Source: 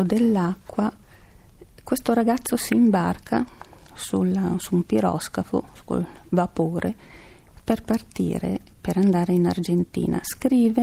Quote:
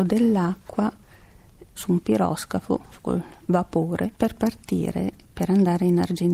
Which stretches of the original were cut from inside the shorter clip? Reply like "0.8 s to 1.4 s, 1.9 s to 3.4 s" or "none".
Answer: 1.8 s to 4.6 s, 7.0 s to 7.6 s